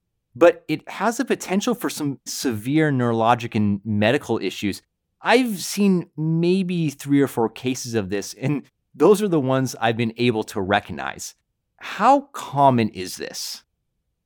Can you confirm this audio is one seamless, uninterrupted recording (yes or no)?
no